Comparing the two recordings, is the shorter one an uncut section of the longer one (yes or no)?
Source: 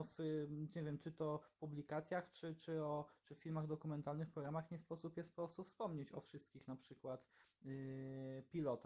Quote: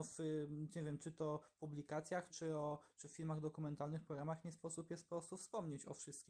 no